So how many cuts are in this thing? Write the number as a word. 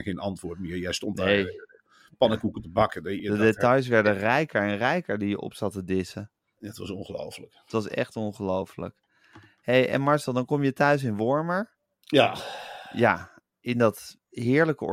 one